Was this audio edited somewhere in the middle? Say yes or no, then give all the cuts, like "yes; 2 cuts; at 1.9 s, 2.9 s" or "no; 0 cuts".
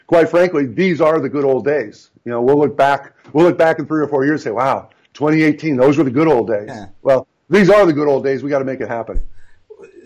no; 0 cuts